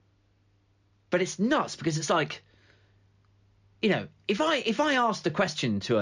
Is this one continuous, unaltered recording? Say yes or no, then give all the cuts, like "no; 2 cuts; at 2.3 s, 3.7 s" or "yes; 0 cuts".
yes; 0 cuts